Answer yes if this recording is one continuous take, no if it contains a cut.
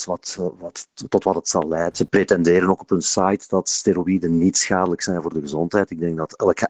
no